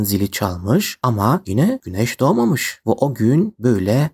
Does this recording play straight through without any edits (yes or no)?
yes